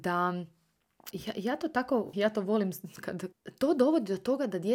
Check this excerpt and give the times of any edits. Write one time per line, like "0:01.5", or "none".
0:01.1
0:02.1
0:03.3

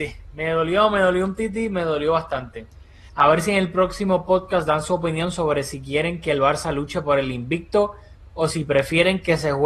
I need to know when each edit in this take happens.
0:03.1

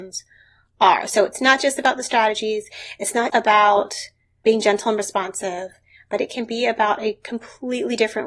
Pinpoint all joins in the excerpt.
0:03.3

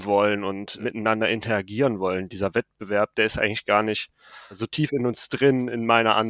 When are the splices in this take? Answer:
none

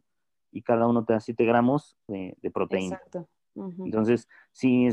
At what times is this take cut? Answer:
0:02.1

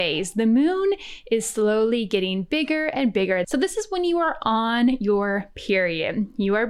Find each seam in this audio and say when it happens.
0:03.4

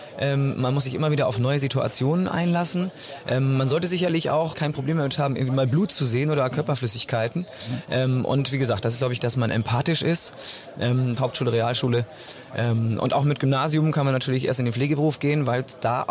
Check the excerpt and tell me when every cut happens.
0:04.5
0:09.2
0:11.2

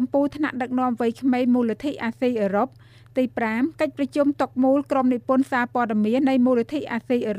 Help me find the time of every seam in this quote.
0:06.2

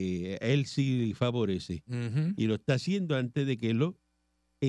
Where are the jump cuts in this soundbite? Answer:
none

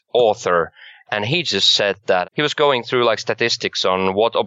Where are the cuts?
none

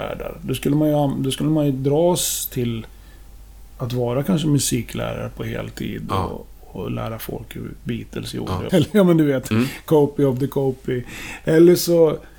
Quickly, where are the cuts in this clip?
0:08.7

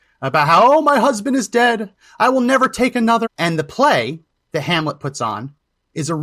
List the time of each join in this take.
0:03.3

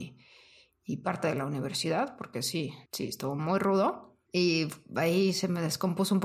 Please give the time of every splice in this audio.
0:02.9

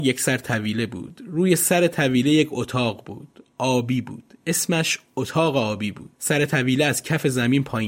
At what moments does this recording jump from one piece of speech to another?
0:06.1

